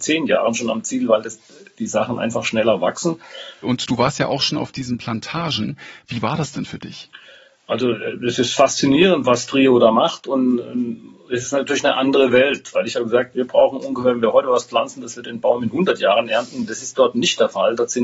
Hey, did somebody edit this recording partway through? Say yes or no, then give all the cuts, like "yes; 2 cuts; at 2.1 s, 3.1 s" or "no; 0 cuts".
yes; 1 cut; at 3.6 s